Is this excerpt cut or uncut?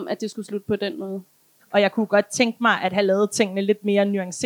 cut